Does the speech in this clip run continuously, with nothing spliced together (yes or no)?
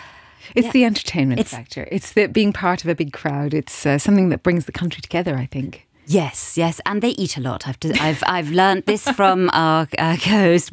yes